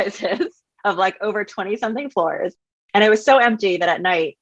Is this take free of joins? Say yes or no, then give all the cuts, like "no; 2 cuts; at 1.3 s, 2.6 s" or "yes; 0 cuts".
yes; 0 cuts